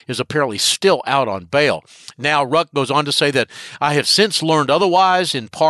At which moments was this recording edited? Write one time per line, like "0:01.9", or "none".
none